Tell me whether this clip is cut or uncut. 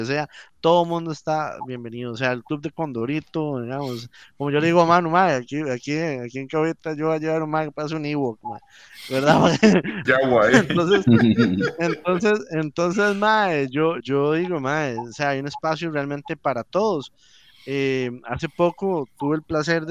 cut